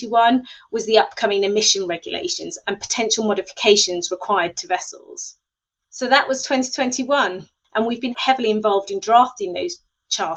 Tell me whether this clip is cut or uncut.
cut